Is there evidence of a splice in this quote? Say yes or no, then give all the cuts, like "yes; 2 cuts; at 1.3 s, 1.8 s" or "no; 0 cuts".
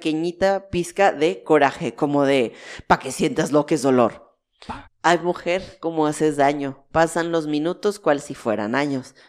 yes; 1 cut; at 4.8 s